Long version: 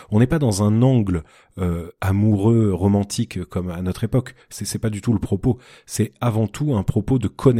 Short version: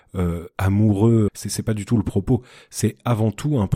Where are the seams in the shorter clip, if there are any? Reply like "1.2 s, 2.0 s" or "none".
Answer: 1.3 s